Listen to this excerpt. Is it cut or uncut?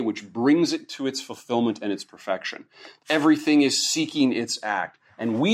cut